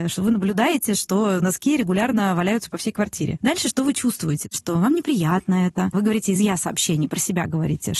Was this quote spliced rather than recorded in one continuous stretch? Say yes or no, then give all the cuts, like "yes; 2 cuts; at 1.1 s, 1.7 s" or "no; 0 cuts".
no; 0 cuts